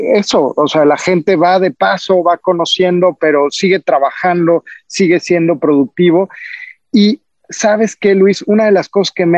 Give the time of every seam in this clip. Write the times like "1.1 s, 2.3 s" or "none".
none

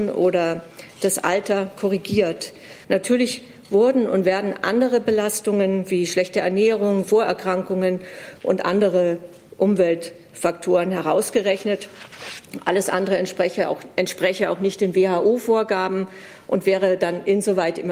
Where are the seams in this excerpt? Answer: 2.8 s, 7.0 s

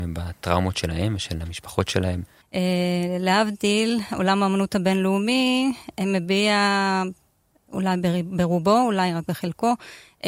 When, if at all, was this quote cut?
2.4 s

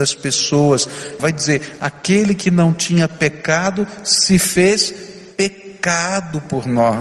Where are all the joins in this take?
1.2 s

